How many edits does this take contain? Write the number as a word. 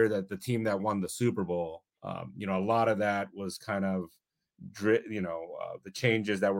one